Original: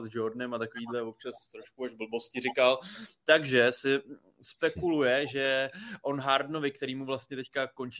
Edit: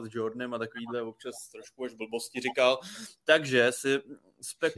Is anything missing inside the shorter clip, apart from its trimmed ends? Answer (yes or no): no